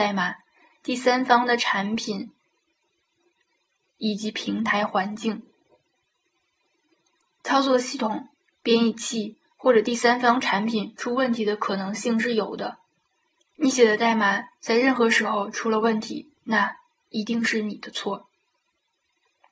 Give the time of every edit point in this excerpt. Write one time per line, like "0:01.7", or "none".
0:13.4
0:16.4